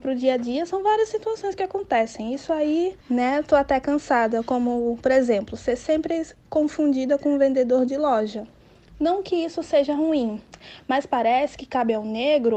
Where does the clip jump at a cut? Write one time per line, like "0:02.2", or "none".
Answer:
0:03.0